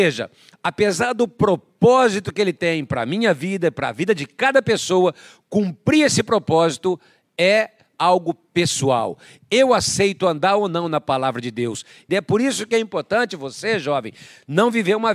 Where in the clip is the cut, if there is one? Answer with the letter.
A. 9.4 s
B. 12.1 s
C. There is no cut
B